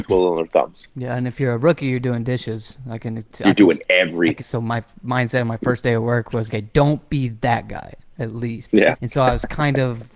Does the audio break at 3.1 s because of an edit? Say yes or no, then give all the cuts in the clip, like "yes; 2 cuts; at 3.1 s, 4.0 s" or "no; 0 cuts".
no; 3 cuts; at 4.4 s, 6.5 s, 8.9 s